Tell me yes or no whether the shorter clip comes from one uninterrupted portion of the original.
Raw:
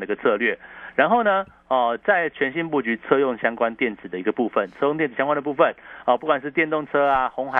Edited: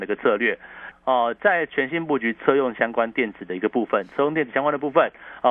no